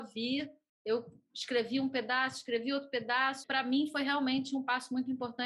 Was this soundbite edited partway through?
yes; 1 cut; at 3.4 s

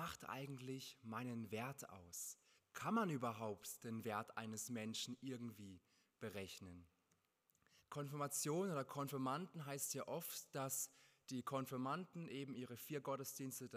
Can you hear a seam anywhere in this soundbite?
yes; 2 cuts; at 2.6 s, 7.8 s

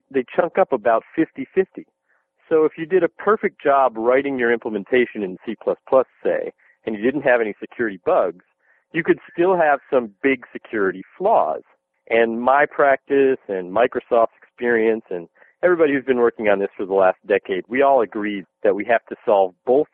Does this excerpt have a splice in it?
yes; 2 cuts; at 11.9 s, 18.4 s

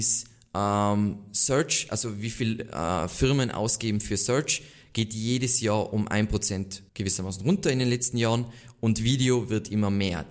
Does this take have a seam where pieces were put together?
yes; 1 cut; at 6.9 s

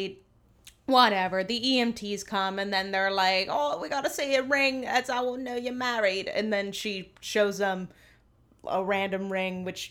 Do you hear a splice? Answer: no; 0 cuts

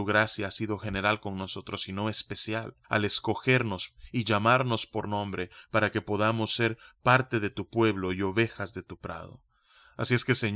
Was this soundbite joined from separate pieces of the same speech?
yes; 1 cut; at 2.8 s

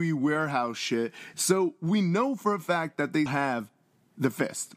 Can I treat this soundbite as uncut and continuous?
no; 2 cuts; at 1.3 s, 3.3 s

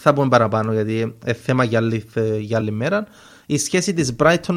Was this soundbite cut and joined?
yes; 1 cut; at 2.6 s

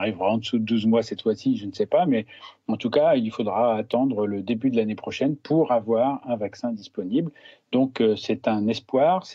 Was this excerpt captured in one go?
yes; 0 cuts

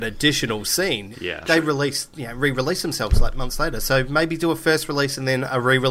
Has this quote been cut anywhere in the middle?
yes; 1 cut; at 1.1 s

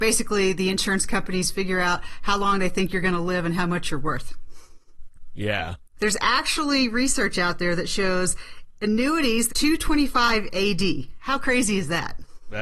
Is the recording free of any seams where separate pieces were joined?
no; 2 cuts; at 6.0 s, 9.5 s

